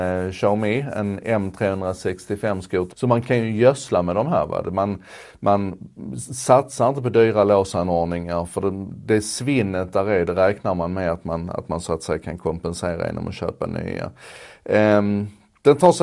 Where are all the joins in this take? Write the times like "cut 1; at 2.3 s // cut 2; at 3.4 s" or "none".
cut 1; at 2.9 s